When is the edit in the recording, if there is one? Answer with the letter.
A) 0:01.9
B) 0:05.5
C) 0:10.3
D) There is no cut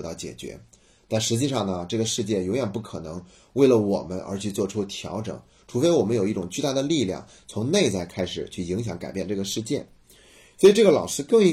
D